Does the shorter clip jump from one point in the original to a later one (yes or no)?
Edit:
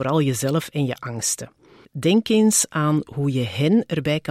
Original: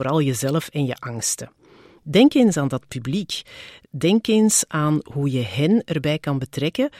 yes